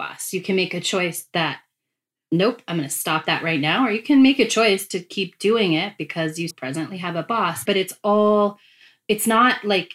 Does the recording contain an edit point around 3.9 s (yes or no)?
no